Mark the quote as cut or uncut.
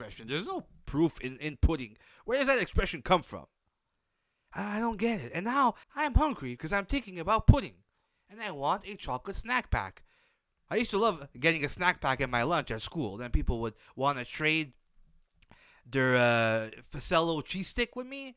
cut